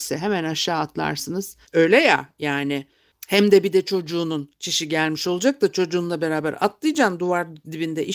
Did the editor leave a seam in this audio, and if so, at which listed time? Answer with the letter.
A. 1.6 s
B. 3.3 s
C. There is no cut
A